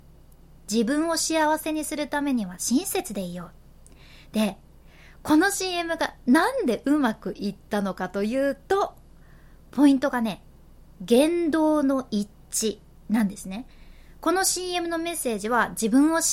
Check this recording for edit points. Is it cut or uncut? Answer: uncut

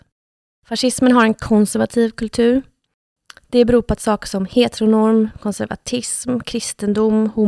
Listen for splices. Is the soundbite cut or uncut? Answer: uncut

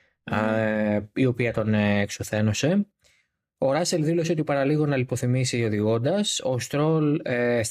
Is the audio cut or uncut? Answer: uncut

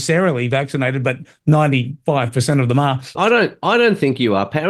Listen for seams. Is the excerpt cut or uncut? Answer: cut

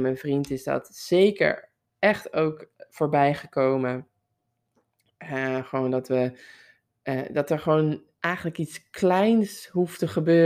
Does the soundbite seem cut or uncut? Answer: uncut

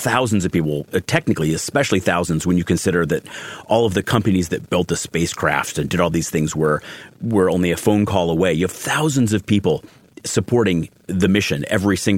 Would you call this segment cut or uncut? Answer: uncut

